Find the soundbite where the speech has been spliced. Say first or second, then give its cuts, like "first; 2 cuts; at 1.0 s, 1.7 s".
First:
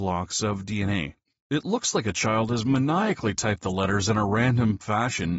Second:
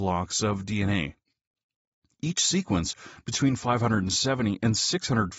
first; 1 cut; at 1.4 s